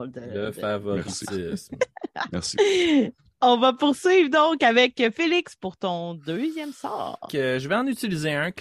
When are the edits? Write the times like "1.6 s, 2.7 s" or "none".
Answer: 7.3 s